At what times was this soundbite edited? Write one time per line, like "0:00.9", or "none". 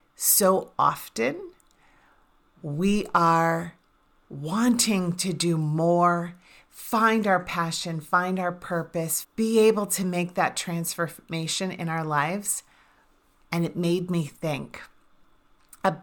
0:09.2
0:13.4